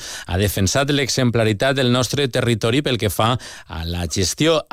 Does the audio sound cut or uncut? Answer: uncut